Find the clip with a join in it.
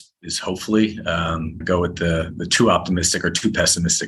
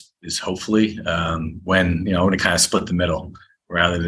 first; 1 cut; at 1.6 s

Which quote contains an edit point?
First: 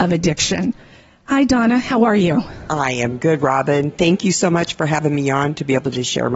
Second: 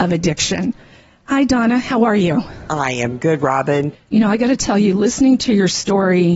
second; 1 cut; at 3.9 s

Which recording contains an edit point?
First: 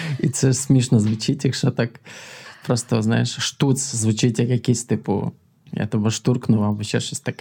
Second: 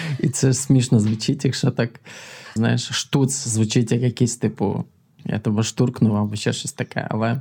second; 1 cut; at 2.6 s

